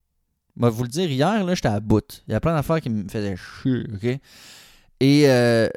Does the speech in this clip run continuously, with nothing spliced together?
yes; 0 cuts

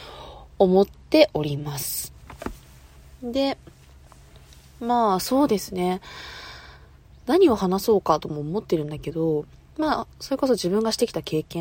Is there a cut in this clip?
no; 0 cuts

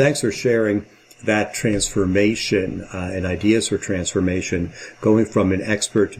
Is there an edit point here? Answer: no; 0 cuts

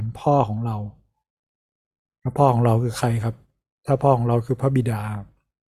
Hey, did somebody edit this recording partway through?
no; 0 cuts

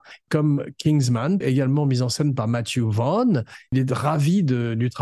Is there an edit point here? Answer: yes; 1 cut; at 1.4 s

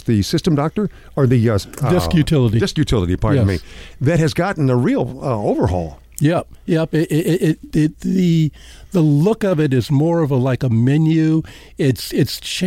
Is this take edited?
yes; 1 cut; at 7.9 s

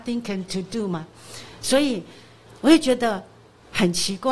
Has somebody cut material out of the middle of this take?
no; 0 cuts

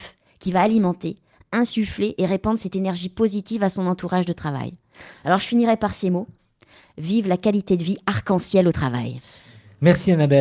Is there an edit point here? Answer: no; 0 cuts

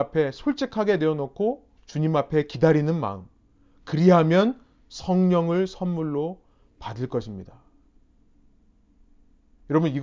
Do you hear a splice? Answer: yes; 1 cut; at 1.8 s

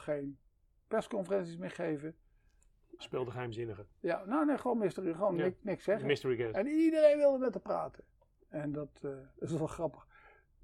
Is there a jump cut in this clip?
yes; 2 cuts; at 3.0 s, 8.4 s

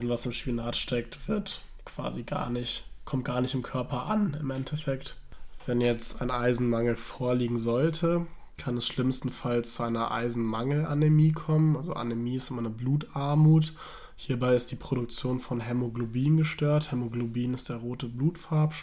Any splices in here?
no; 0 cuts

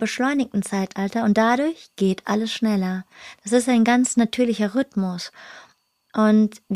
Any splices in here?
no; 0 cuts

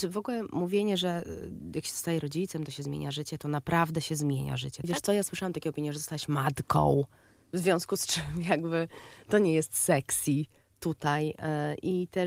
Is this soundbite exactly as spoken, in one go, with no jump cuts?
no; 1 cut; at 4.8 s

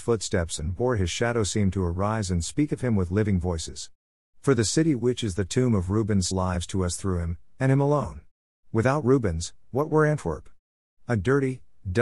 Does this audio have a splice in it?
yes; 2 cuts; at 6.3 s, 8.5 s

